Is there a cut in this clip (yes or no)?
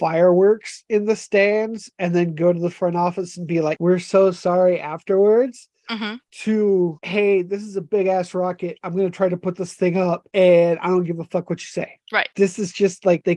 no